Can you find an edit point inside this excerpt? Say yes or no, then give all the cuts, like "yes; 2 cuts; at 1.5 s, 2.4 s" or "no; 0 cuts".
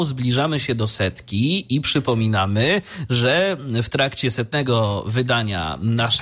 no; 0 cuts